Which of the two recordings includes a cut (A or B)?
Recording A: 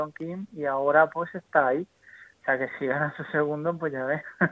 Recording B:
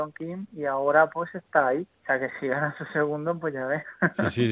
B